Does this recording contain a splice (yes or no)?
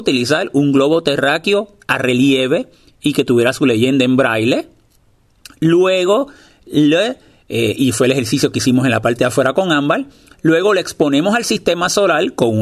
no